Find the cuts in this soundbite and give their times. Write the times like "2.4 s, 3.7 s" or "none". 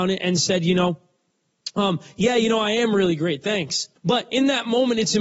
4.0 s

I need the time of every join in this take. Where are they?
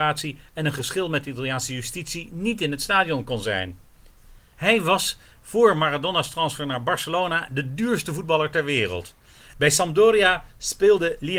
4.5 s, 9.5 s

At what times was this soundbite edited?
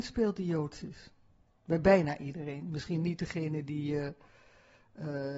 1.5 s

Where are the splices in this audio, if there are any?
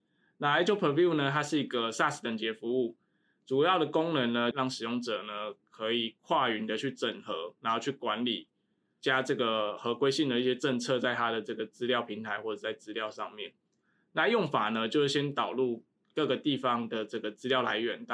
4.5 s

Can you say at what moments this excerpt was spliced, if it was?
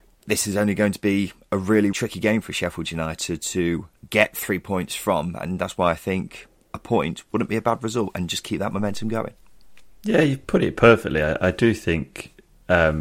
1.9 s, 4.0 s

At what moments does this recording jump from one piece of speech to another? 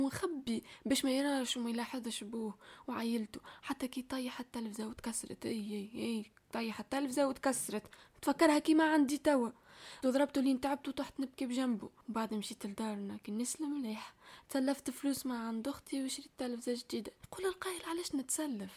10.0 s

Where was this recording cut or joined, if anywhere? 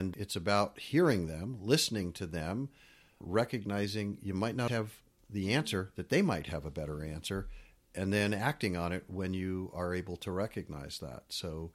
4.7 s

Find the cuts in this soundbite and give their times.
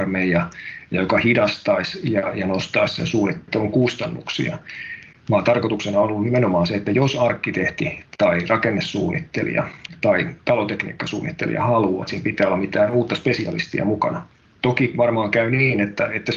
12.0 s

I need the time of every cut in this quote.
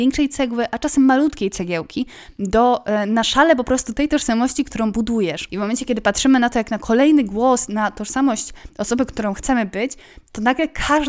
5.5 s

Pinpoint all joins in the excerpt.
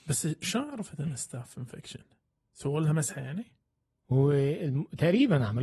4.0 s

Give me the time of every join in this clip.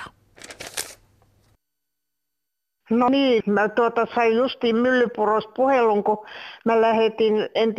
none

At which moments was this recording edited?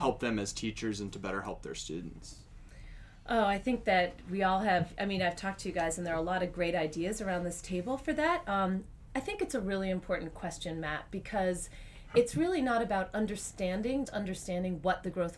14.0 s

